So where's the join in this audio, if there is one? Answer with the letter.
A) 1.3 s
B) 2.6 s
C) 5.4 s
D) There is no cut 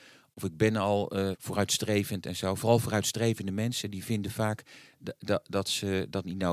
A